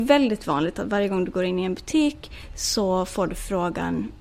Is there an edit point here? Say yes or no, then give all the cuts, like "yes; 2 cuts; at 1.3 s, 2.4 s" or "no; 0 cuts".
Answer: no; 0 cuts